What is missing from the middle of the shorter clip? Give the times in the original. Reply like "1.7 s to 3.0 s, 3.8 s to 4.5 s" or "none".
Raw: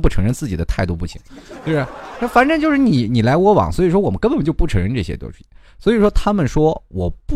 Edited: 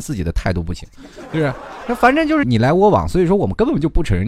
2.8 s to 3.1 s